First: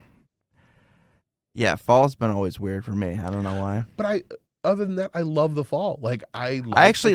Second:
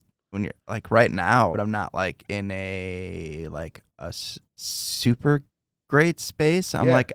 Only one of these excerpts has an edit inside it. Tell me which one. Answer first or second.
second